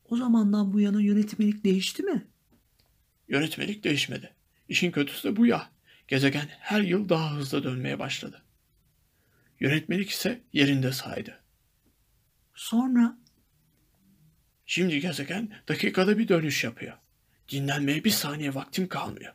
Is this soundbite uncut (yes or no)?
yes